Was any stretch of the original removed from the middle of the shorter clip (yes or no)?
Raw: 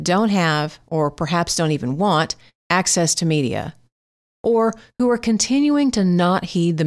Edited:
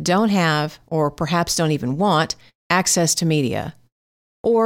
no